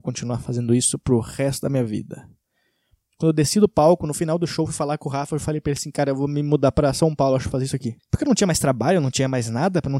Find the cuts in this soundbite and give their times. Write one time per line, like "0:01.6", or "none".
0:08.0